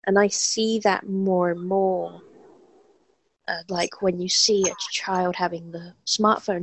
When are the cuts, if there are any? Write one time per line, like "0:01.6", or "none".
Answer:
0:03.7